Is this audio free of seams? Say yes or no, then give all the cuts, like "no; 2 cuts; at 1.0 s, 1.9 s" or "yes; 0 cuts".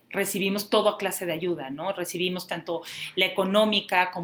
yes; 0 cuts